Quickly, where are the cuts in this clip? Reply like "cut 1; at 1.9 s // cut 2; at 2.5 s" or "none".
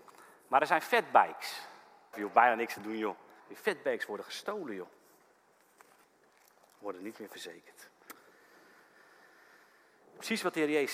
cut 1; at 2.1 s // cut 2; at 3.4 s